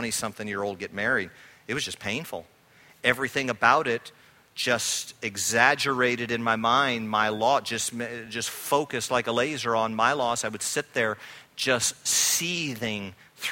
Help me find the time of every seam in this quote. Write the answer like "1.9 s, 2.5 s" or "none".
none